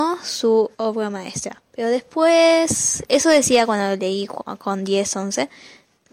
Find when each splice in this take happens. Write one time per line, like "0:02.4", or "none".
0:01.7